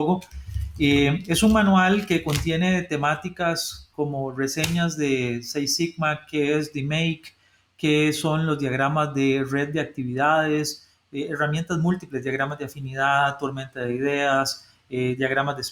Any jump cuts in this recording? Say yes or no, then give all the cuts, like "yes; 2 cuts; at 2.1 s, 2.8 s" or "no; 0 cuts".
no; 0 cuts